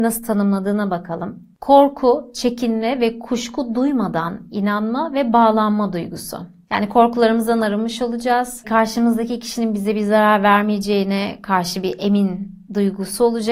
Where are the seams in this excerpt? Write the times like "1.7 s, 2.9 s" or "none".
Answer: none

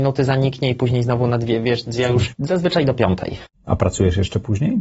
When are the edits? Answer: 2.3 s, 3.5 s

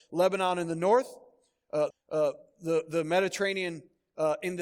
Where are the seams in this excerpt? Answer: 1.9 s

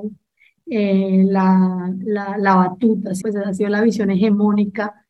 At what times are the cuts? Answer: 3.2 s

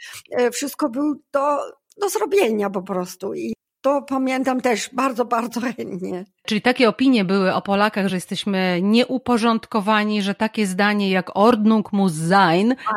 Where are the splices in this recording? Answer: none

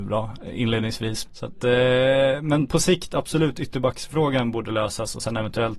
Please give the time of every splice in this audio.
1.3 s

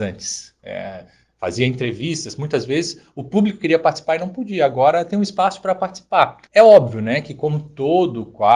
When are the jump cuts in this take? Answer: 6.5 s

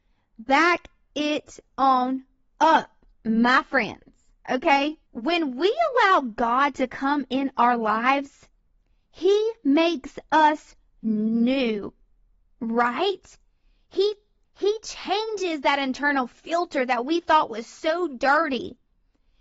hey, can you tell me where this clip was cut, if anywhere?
5.1 s

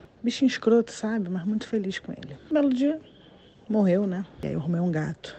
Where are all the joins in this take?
none

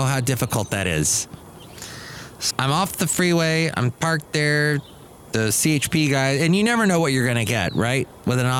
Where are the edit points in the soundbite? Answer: 2.5 s

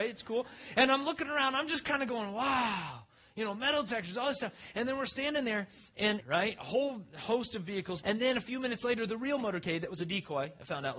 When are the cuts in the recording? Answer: 6.2 s, 8.0 s

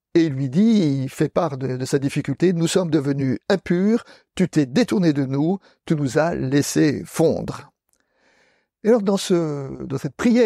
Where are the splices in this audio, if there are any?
none

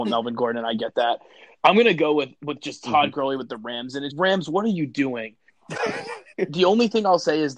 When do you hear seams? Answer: 4.1 s, 5.5 s

